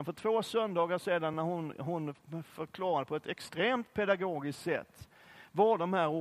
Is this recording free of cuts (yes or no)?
yes